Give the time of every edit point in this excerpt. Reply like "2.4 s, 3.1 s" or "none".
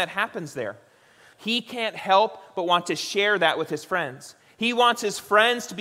1.3 s